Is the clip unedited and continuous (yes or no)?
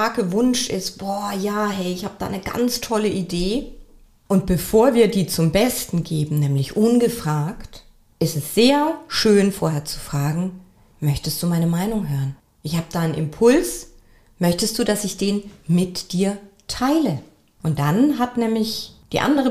yes